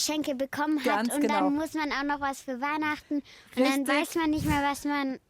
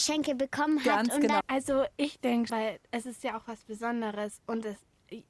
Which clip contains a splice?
second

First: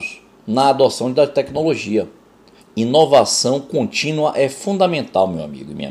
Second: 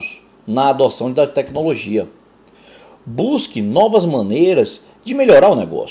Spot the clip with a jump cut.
first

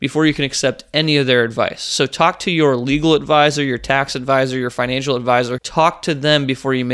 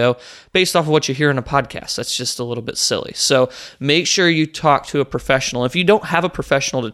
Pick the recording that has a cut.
first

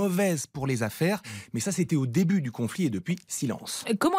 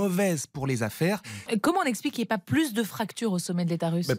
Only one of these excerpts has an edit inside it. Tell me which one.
second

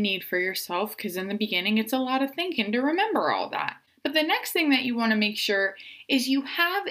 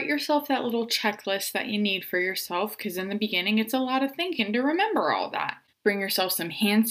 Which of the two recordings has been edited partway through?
second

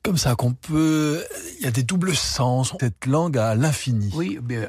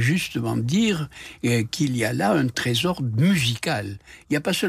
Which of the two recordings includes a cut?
first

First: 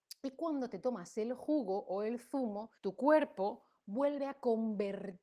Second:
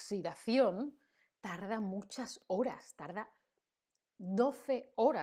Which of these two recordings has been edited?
first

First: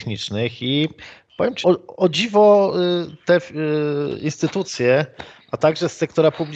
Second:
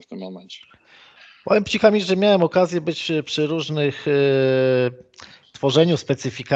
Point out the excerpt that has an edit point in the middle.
first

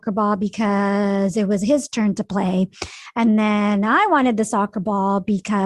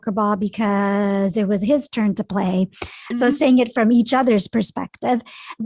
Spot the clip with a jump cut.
second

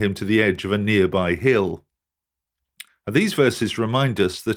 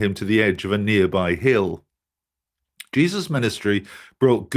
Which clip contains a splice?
first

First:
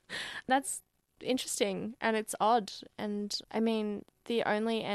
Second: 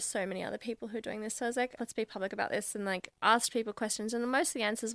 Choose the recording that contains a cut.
second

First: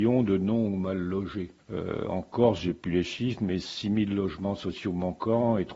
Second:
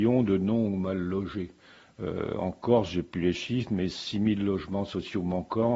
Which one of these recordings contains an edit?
first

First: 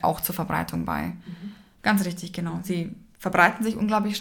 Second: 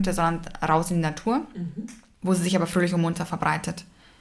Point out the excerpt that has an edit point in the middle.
first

